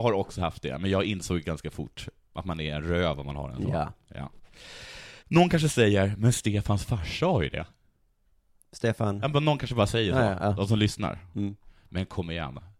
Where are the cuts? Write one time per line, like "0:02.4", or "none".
0:05.2